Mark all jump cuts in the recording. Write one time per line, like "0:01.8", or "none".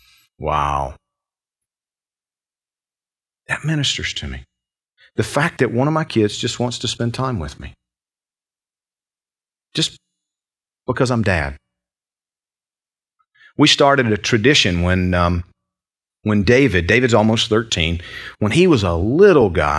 none